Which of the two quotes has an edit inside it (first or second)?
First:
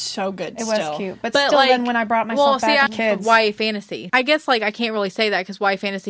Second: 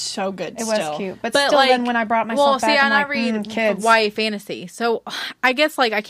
first